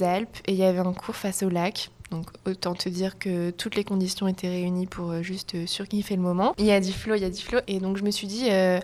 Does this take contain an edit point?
yes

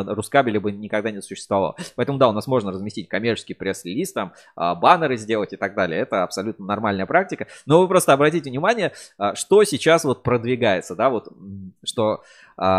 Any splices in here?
yes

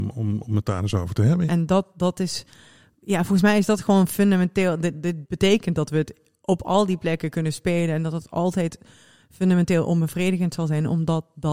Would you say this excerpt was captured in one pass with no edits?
no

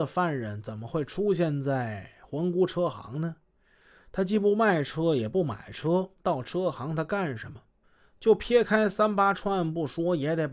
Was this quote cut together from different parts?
no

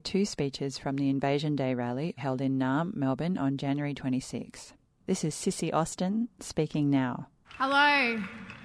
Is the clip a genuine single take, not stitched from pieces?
no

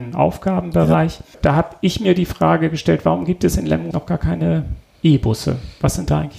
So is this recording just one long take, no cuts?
no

